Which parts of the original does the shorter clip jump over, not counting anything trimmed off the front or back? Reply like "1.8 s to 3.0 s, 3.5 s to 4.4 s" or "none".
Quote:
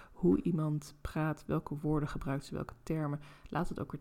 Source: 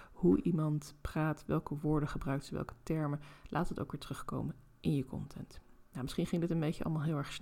none